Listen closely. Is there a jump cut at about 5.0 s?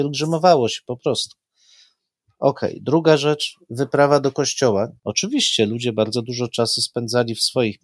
yes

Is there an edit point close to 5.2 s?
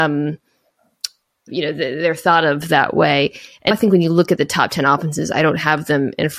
no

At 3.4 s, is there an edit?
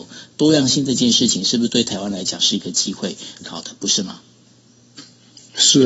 yes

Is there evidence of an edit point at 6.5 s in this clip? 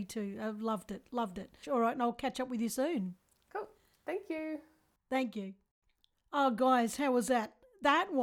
no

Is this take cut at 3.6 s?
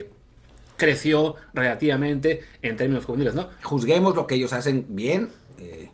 yes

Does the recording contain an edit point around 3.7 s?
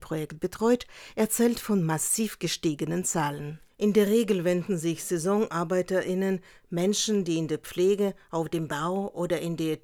yes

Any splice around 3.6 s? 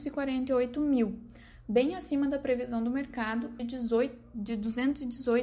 yes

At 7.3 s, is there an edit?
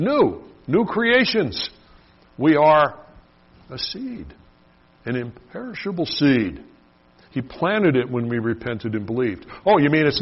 yes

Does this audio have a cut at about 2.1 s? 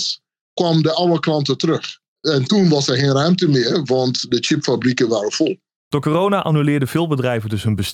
no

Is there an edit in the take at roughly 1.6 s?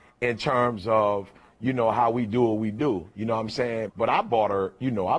no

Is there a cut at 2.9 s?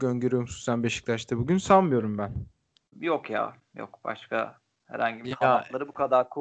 yes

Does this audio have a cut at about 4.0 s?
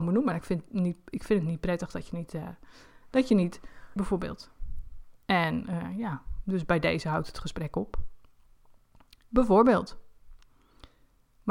yes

